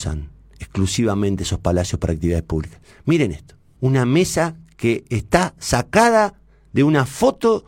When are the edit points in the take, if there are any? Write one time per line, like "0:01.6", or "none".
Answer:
0:03.8